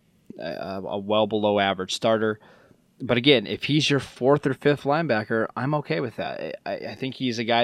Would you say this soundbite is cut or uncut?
uncut